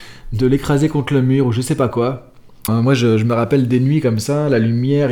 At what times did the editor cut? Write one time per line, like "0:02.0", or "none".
0:02.7